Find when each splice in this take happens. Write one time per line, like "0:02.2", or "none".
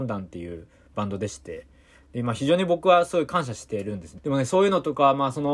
0:04.2